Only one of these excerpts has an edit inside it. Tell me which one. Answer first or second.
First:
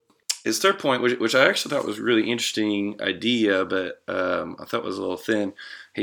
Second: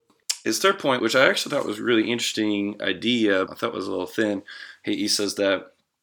second